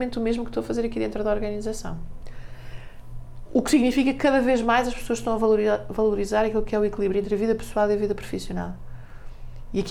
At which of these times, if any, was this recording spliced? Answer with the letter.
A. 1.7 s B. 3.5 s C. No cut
C